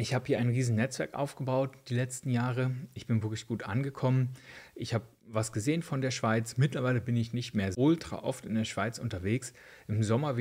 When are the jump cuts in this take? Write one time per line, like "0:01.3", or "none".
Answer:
0:07.7